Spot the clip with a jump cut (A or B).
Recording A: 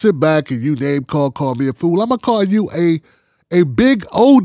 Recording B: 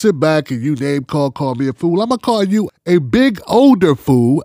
B